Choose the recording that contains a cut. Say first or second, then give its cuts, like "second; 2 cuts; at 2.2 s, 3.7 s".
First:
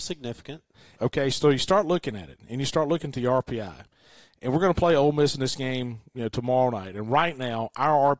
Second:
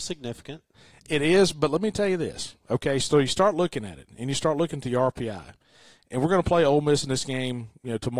first; 1 cut; at 0.9 s